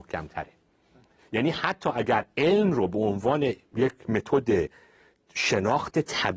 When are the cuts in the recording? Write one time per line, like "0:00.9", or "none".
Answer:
none

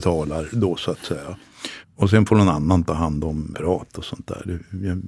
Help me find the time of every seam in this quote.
0:01.8
0:03.5

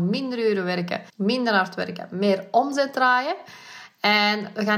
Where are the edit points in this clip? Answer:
0:01.1

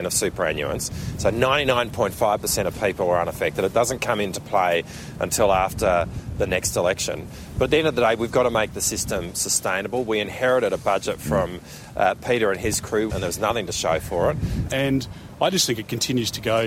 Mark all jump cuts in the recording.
0:13.1
0:14.7

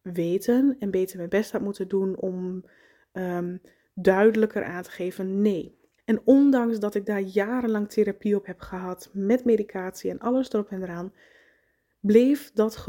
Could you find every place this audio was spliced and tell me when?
0:06.0

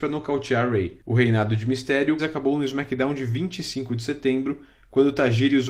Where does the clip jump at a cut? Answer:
0:02.2

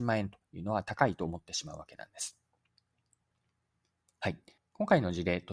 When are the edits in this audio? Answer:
0:04.6

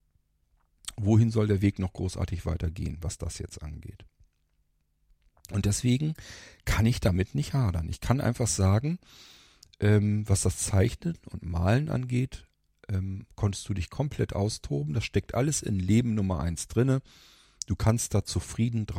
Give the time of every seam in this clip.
none

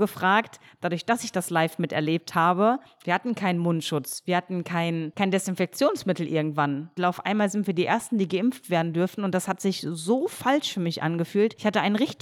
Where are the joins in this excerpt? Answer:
0:07.0

